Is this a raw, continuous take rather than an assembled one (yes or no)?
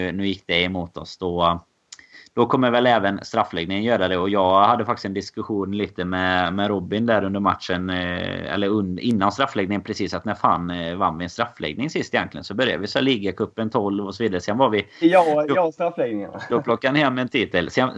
no